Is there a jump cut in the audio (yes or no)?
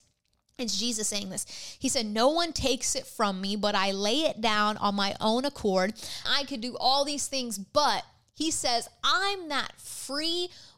yes